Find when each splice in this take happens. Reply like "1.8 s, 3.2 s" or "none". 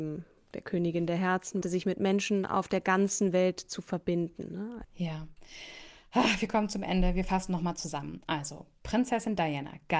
1.6 s, 4.8 s